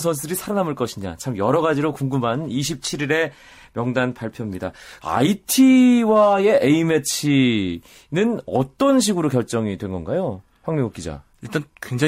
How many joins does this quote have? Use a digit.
1